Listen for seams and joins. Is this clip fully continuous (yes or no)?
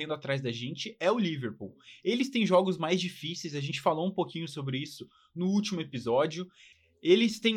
yes